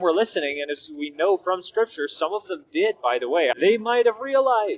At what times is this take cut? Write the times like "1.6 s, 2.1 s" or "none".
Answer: 3.5 s

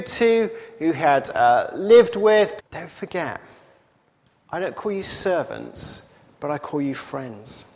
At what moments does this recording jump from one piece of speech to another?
2.6 s

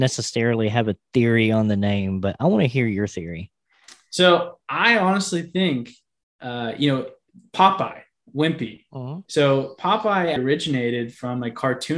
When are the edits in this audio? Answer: 9.3 s, 10.4 s

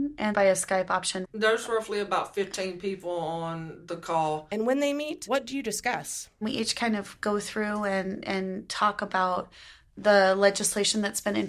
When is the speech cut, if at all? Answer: 1.2 s

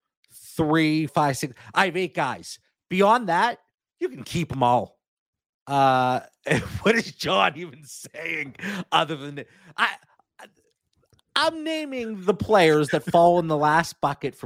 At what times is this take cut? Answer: 1.1 s, 5.5 s

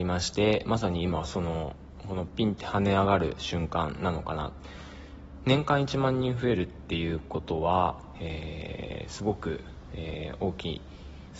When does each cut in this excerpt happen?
8.1 s

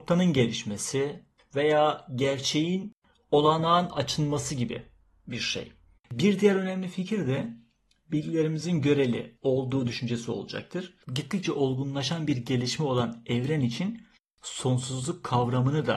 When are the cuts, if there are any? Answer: 6.0 s, 11.0 s

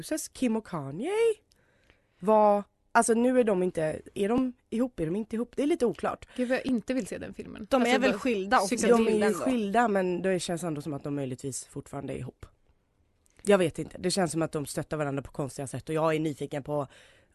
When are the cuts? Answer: none

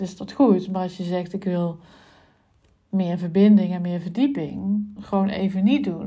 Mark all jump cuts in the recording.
5.0 s

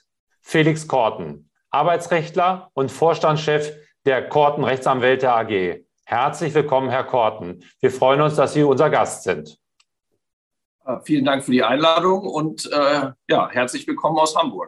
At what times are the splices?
none

